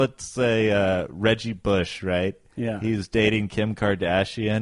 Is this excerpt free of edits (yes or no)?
yes